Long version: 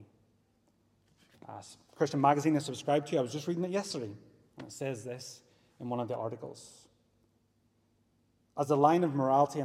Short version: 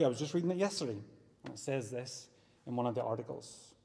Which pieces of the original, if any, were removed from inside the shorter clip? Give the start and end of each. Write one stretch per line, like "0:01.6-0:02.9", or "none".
none